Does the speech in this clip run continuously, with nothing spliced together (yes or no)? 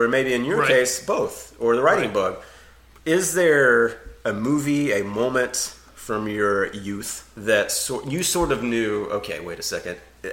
yes